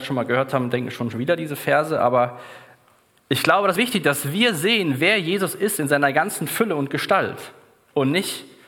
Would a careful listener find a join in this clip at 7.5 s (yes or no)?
no